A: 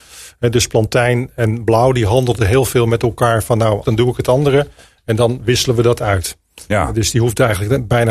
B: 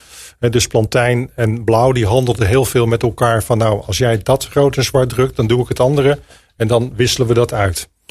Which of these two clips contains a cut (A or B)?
A